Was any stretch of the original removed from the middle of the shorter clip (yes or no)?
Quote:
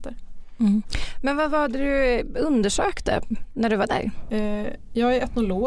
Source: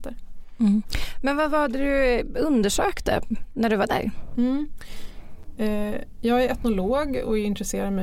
yes